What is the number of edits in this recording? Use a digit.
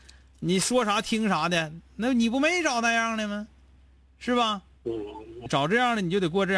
1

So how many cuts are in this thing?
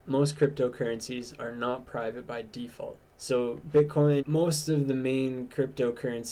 2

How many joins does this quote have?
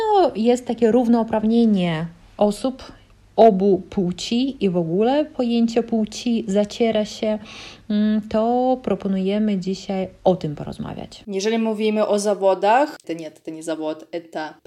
2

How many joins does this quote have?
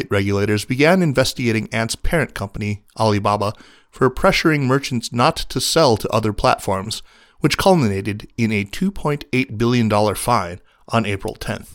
0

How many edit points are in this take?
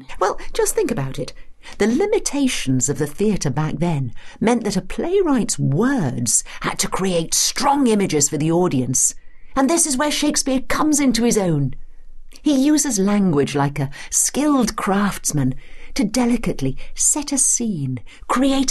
0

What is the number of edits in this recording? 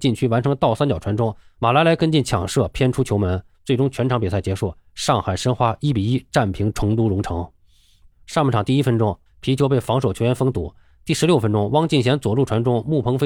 3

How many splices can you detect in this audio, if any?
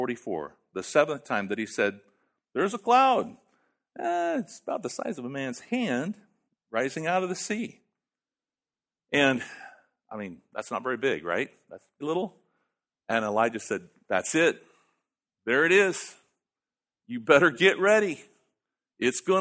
1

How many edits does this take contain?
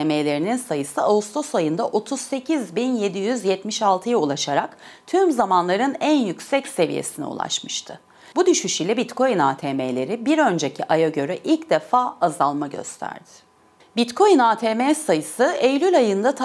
2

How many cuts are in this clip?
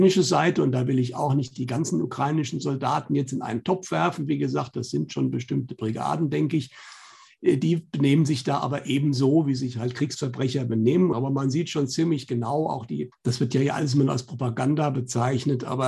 2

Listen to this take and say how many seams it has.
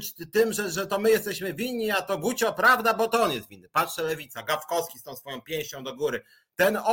0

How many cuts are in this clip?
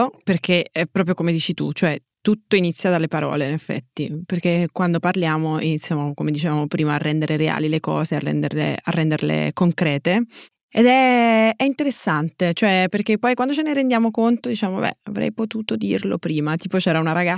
0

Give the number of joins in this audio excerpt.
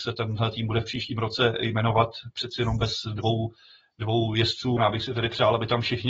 1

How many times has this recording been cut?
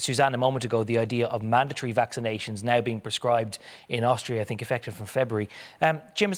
0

